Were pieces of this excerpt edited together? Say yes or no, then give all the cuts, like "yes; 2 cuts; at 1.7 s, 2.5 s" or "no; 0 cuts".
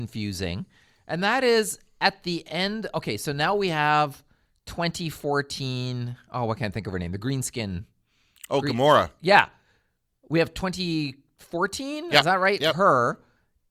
no; 0 cuts